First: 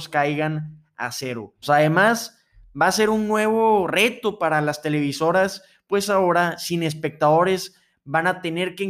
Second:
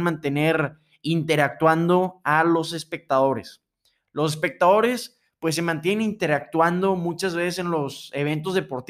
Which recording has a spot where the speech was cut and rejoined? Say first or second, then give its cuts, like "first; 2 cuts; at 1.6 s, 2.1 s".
first; 1 cut; at 1.6 s